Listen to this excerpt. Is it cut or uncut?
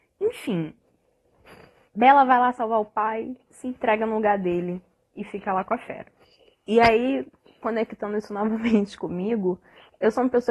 uncut